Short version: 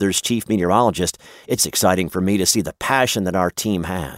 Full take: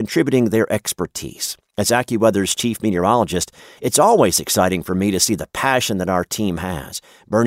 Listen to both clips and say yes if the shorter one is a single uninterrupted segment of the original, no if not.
no